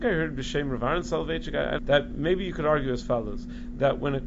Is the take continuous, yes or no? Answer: no